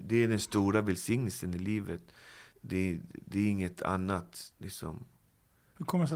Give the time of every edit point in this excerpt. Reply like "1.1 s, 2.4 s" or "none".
2.5 s, 4.5 s